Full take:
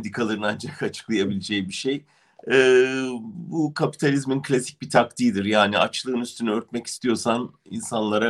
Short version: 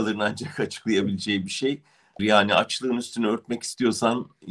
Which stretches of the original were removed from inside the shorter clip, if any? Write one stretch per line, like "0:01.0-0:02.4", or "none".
0:02.4-0:05.4